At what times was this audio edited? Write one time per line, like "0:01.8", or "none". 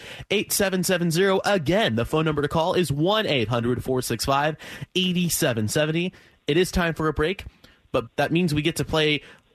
0:08.1

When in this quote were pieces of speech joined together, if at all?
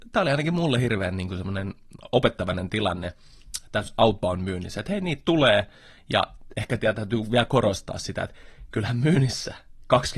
none

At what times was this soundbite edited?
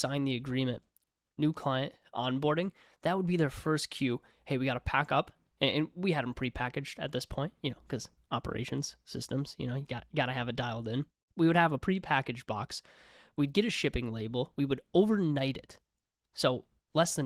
0:01.3

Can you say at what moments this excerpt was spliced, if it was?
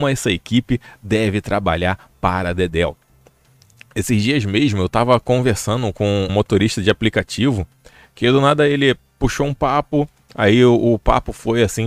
0:06.3

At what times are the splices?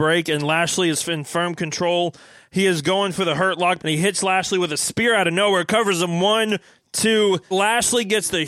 0:03.8
0:07.5

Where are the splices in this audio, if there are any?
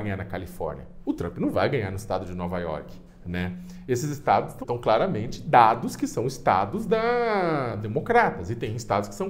0:04.6

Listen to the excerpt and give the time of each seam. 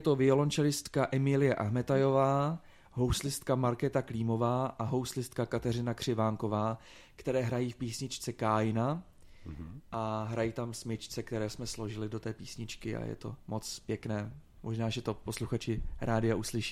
none

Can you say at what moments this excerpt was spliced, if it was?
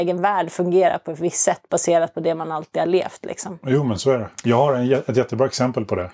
none

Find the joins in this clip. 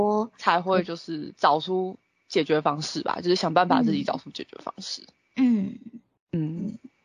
none

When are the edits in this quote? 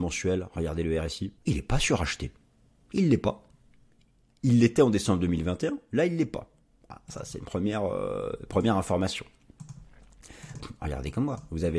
0:01.4
0:10.5

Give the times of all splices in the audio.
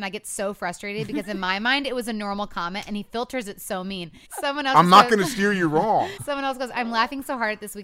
0:04.3
0:06.2

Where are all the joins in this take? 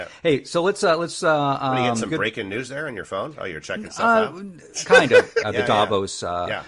0:05.4

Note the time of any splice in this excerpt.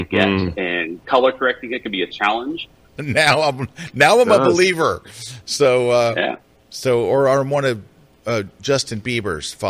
0:03.0

